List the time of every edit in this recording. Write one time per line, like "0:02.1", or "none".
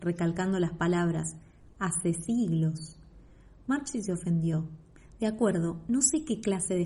none